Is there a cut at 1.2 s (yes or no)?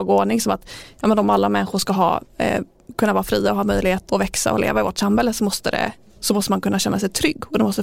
no